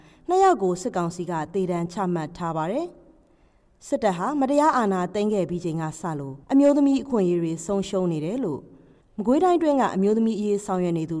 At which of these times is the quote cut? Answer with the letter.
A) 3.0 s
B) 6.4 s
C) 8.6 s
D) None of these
B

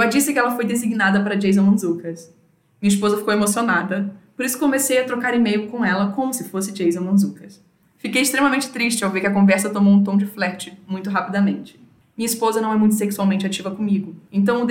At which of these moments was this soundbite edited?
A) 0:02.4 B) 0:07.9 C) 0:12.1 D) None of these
D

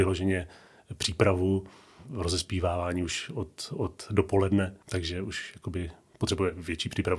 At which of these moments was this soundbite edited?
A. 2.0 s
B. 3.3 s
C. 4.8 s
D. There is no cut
C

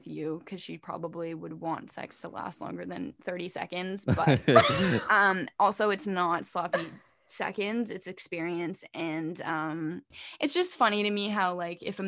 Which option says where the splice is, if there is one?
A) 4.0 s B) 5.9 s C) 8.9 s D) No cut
D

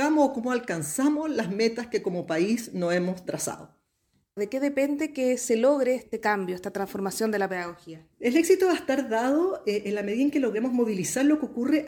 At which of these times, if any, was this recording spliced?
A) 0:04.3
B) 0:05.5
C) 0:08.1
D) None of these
C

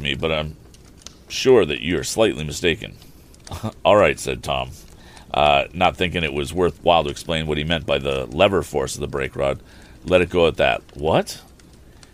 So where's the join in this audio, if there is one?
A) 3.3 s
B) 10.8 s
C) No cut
B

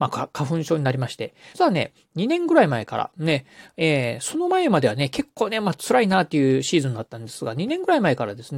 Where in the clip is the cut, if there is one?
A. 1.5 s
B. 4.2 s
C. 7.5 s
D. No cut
A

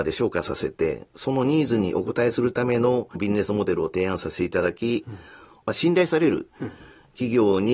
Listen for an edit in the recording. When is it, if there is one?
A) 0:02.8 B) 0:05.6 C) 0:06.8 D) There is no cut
B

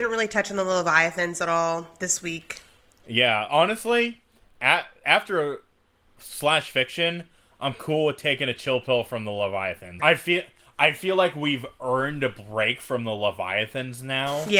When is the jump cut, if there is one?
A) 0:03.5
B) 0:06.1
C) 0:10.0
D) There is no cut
C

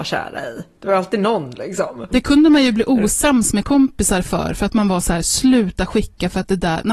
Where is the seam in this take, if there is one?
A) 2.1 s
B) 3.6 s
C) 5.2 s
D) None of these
A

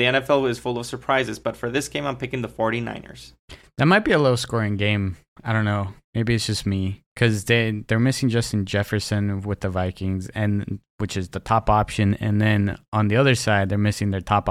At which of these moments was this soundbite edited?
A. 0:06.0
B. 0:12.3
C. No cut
A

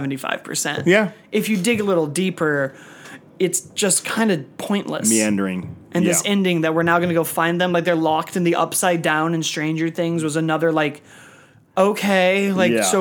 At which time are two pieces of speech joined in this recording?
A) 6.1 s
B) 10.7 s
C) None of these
C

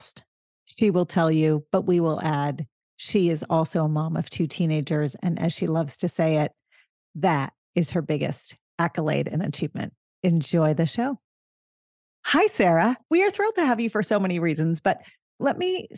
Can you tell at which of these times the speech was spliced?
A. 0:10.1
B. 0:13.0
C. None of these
B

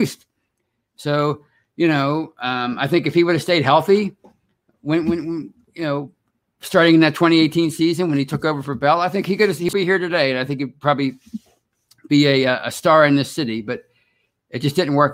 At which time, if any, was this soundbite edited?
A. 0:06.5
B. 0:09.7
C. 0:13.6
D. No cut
B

